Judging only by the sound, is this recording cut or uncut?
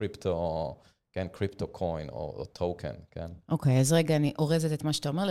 uncut